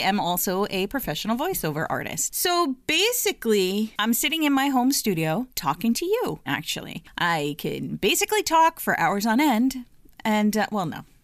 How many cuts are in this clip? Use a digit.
1